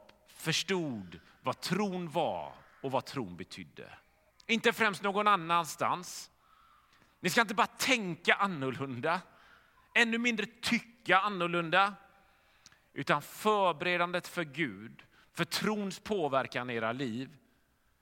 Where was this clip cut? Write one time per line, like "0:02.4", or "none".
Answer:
0:04.3